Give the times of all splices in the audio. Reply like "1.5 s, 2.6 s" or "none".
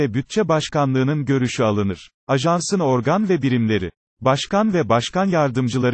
2.2 s, 4.0 s